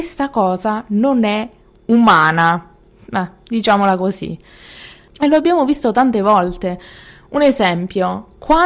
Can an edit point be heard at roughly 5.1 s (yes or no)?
yes